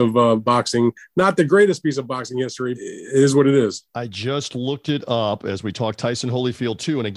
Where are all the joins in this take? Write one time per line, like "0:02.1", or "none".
0:02.7